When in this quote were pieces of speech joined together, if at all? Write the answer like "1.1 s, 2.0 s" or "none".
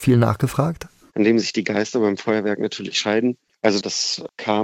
1.1 s, 3.5 s

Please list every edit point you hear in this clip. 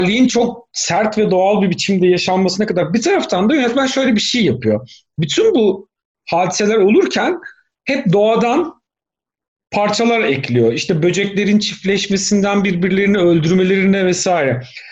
none

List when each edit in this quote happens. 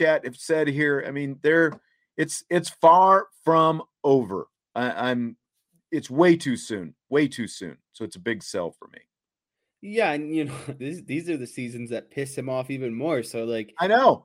10.8 s

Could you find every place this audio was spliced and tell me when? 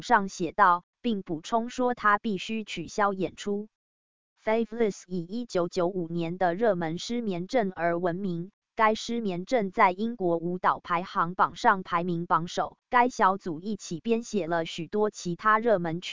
12.8 s

